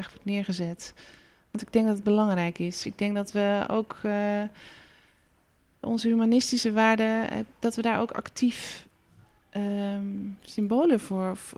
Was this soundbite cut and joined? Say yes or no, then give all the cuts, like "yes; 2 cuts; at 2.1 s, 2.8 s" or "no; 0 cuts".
no; 0 cuts